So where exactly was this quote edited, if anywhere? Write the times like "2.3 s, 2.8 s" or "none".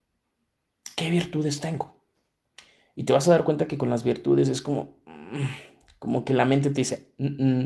none